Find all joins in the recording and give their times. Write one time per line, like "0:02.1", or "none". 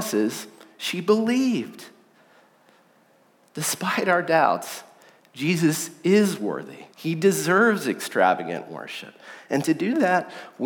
0:06.9